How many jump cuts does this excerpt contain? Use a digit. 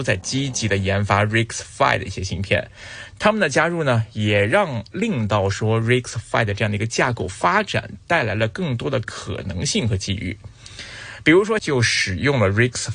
1